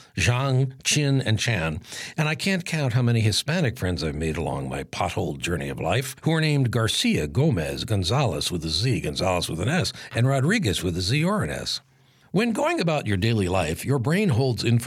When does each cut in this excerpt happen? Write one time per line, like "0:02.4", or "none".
none